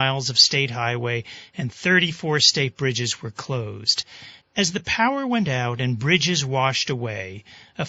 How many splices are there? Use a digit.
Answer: 1